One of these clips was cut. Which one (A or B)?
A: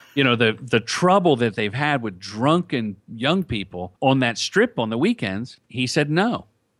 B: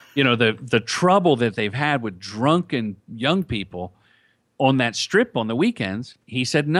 A